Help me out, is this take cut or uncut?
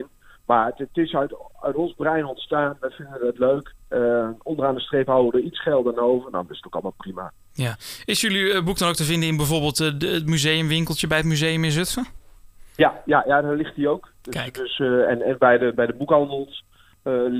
uncut